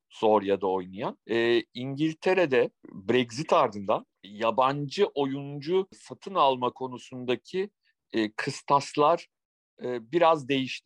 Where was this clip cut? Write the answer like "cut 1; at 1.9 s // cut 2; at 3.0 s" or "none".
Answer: cut 1; at 1.2 s